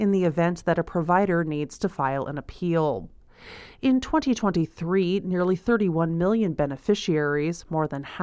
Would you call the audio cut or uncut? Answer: uncut